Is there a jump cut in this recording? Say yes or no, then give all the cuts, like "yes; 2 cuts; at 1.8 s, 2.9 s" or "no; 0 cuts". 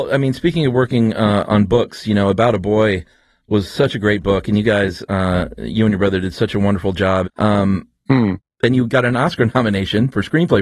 yes; 1 cut; at 7.2 s